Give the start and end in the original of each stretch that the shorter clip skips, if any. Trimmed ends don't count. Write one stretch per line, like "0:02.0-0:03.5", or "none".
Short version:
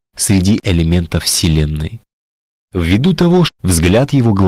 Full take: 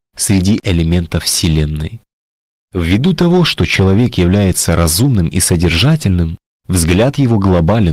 0:03.5-0:06.5